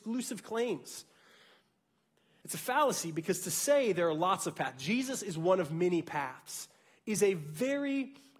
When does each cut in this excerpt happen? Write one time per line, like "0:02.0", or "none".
0:02.4